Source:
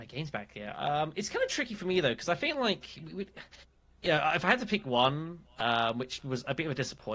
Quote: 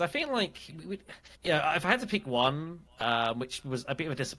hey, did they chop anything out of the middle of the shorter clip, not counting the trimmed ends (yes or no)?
yes